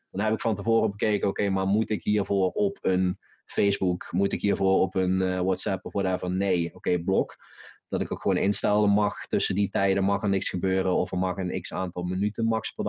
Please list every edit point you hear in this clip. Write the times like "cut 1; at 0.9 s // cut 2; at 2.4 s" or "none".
none